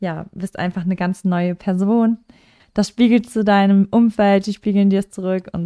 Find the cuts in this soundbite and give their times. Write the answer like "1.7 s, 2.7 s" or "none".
2.6 s